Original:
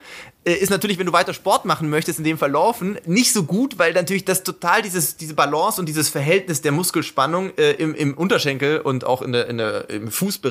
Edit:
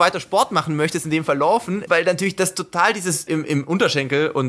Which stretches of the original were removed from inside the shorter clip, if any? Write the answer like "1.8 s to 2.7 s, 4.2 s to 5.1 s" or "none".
3.0 s to 3.8 s, 5.2 s to 7.8 s